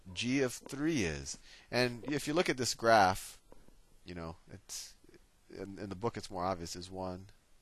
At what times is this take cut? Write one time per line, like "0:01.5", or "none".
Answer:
none